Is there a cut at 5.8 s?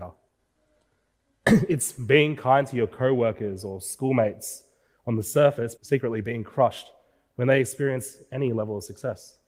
yes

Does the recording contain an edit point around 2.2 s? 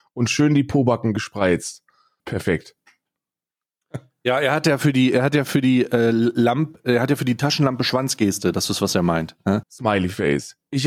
yes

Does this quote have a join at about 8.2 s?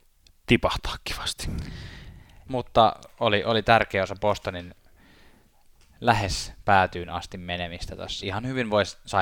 yes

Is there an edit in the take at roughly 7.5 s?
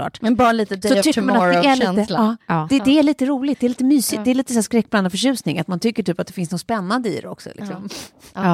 no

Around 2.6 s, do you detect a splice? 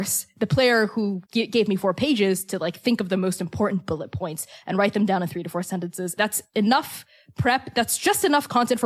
no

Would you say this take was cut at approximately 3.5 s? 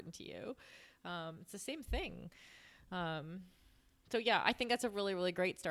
no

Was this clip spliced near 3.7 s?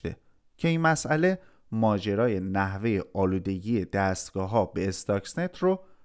no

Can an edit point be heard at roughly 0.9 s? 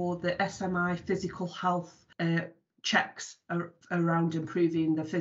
no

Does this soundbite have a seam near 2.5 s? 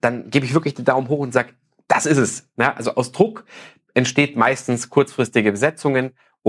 no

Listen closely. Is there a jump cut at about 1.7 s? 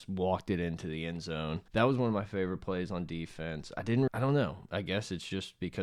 yes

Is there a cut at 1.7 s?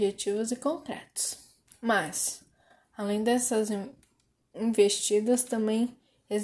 no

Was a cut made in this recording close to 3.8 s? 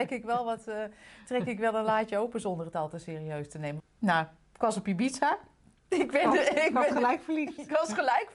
yes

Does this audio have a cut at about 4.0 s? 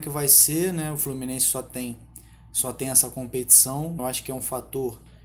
yes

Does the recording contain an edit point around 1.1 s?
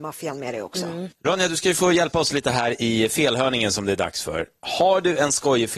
yes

